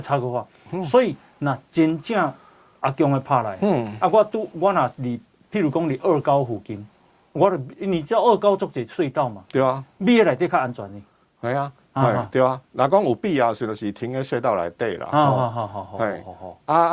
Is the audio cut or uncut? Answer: uncut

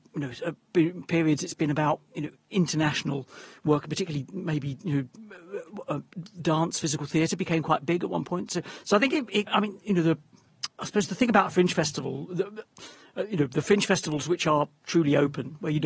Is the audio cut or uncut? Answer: cut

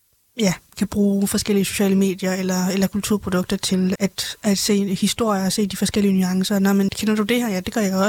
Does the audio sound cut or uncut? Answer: cut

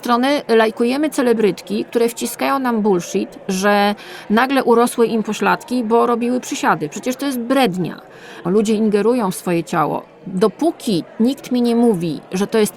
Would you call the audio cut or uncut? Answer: cut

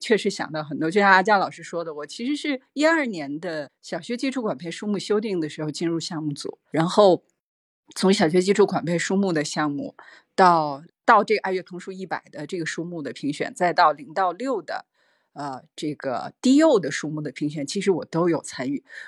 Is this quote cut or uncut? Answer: uncut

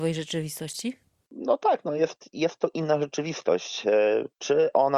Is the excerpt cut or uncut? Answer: uncut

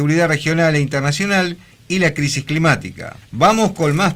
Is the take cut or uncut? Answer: cut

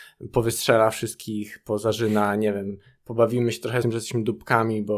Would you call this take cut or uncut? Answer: cut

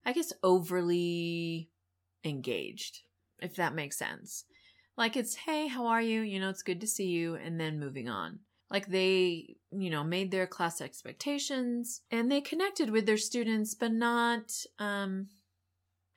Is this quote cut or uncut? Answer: cut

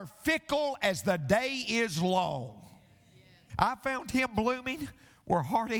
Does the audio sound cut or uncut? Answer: cut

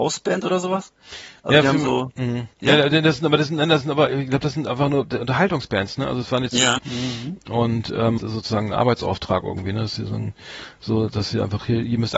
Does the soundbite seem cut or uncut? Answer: cut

